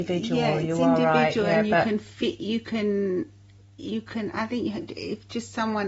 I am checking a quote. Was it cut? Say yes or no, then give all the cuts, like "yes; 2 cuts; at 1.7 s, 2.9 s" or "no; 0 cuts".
no; 0 cuts